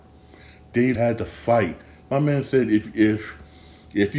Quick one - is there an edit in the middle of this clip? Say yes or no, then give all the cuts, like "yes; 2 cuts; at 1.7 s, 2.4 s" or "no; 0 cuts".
yes; 1 cut; at 0.9 s